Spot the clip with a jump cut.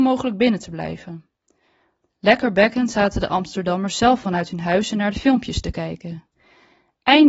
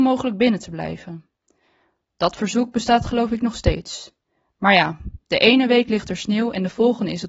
first; 1 cut; at 2.0 s

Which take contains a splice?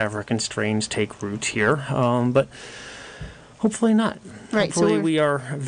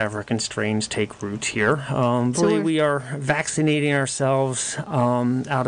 second; 1 cut; at 2.3 s

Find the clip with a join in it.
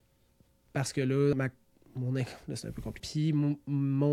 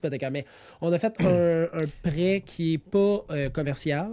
first; 2 cuts; at 1.3 s, 3.0 s

